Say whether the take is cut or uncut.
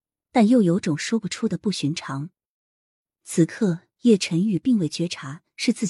uncut